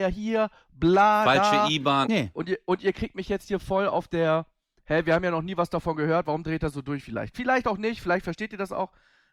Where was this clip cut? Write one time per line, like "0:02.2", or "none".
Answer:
0:02.0

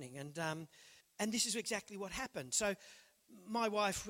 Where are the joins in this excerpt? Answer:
0:01.0

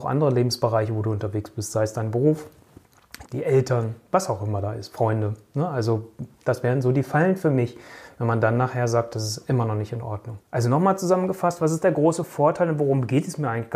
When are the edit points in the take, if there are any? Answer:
0:03.2
0:10.4

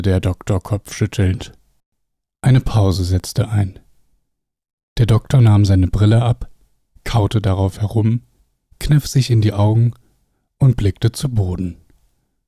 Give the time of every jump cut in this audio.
none

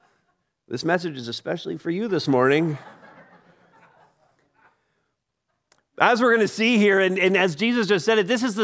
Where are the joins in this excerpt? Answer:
none

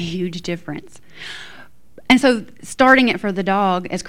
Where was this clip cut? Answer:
none

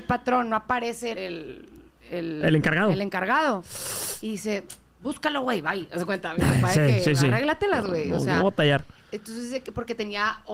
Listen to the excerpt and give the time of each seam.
0:01.1

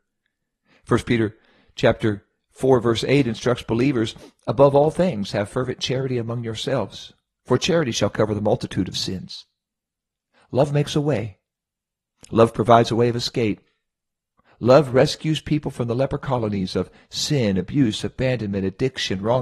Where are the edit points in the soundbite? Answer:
none

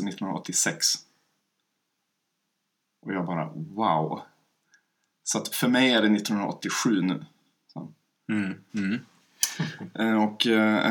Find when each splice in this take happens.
0:08.7

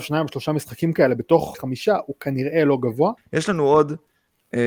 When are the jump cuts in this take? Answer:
0:01.5
0:03.2

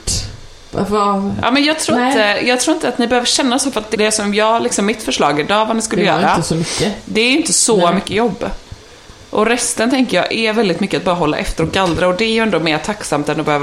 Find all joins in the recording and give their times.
0:03.9

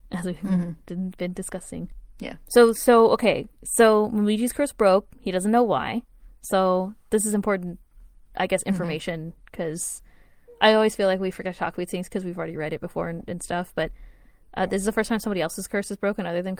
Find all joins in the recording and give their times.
none

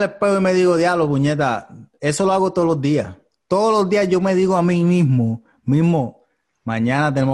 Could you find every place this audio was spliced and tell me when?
none

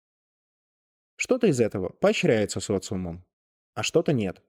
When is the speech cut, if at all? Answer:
none

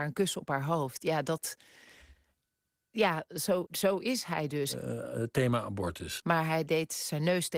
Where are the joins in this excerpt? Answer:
0:03.7
0:06.2

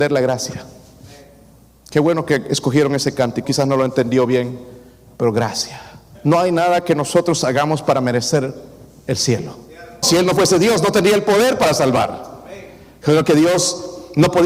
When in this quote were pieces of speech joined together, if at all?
0:03.4
0:06.1
0:10.0

